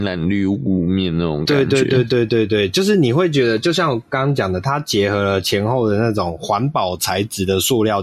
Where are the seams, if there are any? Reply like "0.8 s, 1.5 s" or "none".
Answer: none